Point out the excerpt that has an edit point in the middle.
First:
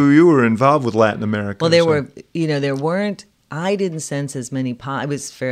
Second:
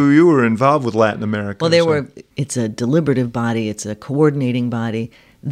second; 1 cut; at 2.3 s

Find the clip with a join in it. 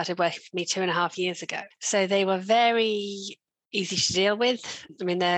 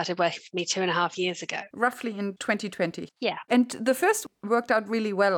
first; 1 cut; at 1.7 s

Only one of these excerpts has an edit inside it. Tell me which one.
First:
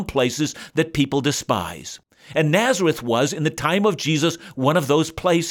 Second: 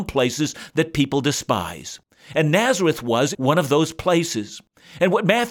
second; 1 cut; at 3.3 s

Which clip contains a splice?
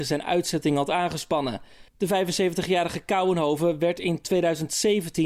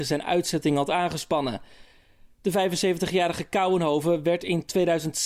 first; 1 cut; at 1.9 s

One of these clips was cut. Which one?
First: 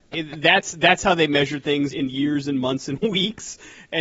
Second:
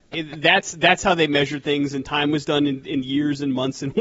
first; 1 cut; at 1.9 s

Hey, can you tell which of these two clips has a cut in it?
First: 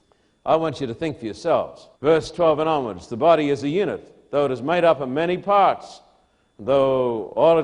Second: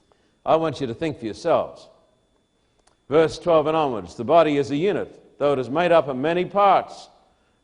first; 1 cut; at 1.9 s

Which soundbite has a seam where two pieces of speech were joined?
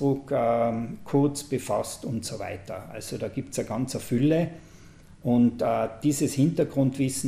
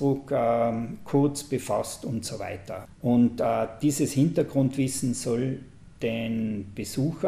second; 1 cut; at 2.8 s

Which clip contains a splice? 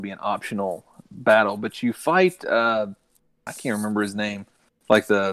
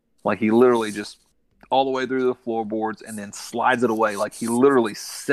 first; 1 cut; at 1.0 s

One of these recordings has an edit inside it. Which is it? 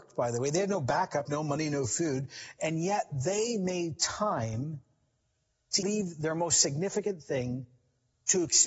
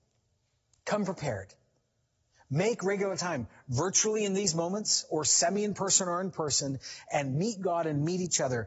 first; 2 cuts; at 1.2 s, 5.8 s

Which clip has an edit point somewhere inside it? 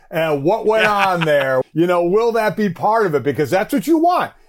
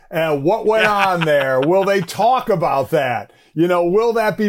first; 1 cut; at 1.6 s

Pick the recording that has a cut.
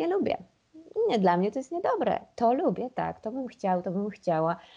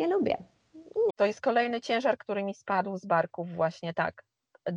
second; 1 cut; at 1.1 s

